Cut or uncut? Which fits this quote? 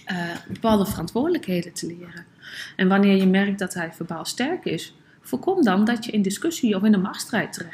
cut